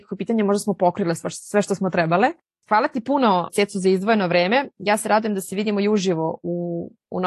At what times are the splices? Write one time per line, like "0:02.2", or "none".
none